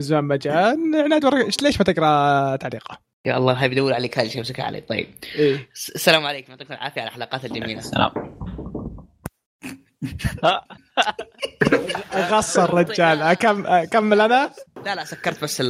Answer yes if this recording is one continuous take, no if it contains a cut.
yes